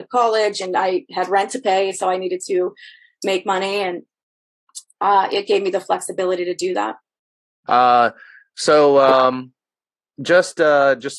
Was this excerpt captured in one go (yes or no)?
no